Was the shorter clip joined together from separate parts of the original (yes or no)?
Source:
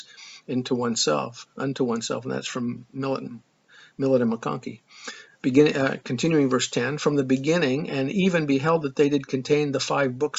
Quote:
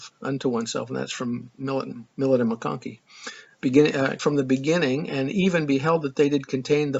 yes